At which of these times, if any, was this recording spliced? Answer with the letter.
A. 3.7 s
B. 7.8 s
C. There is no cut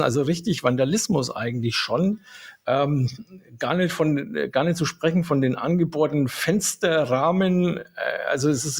C